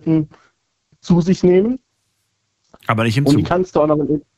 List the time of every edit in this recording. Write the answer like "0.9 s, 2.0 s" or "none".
none

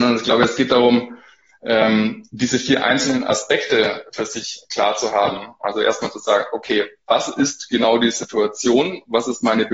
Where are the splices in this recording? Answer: none

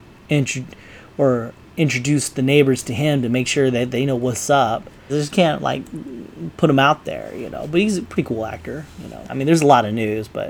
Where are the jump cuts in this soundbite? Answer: 5.1 s, 9.2 s

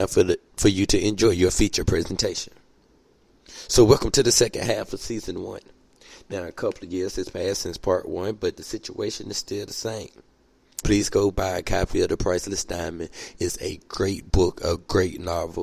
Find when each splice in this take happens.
10.8 s

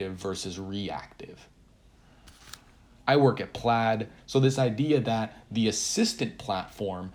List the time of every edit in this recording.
2.9 s, 4.2 s

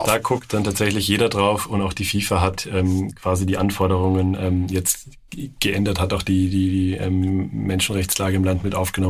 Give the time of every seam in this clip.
none

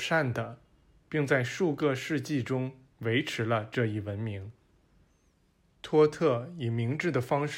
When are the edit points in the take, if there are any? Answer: 1.0 s

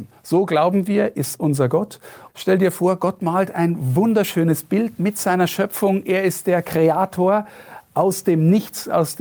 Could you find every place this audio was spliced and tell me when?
2.3 s

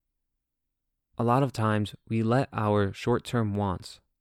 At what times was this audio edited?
1.0 s

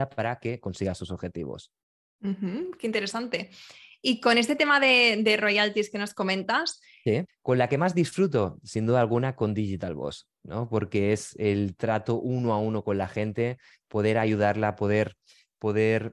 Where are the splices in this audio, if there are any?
7.3 s

